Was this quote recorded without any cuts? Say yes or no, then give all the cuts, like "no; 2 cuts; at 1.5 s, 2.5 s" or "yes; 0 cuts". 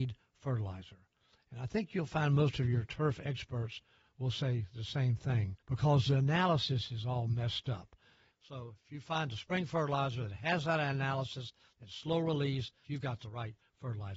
no; 3 cuts; at 5.6 s, 8.3 s, 12.8 s